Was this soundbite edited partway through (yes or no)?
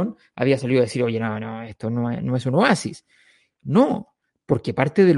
no